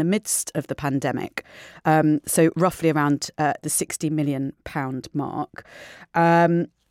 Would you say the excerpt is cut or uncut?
uncut